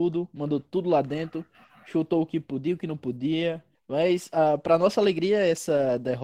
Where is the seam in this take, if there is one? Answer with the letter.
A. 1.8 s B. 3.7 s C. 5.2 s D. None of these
B